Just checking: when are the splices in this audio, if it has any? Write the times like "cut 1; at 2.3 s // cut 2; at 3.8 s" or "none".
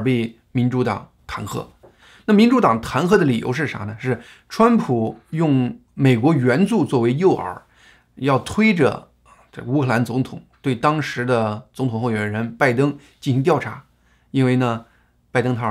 none